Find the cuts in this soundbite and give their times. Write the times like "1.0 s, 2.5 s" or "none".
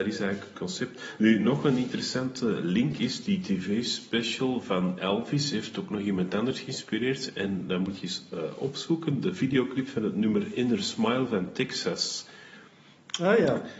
none